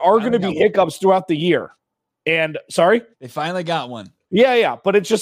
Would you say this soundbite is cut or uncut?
cut